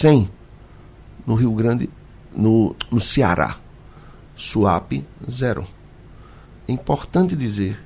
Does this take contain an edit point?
no; 0 cuts

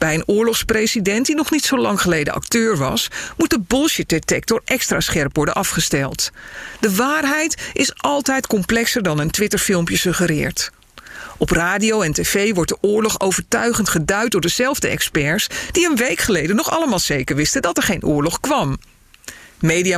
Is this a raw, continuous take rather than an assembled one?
yes; 0 cuts

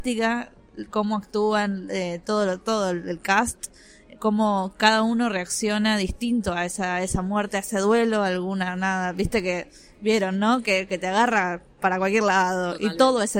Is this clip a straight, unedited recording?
yes; 0 cuts

